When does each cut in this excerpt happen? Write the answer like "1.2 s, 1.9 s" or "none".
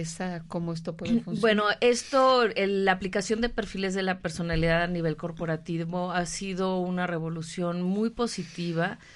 none